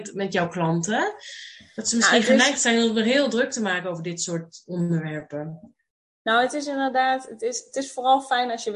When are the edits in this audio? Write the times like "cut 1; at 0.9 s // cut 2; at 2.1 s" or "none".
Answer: none